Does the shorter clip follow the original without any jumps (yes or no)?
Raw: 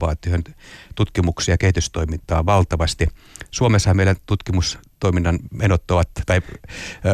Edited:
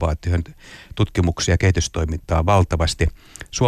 yes